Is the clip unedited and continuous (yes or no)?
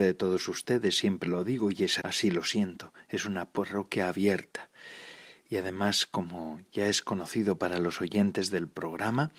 no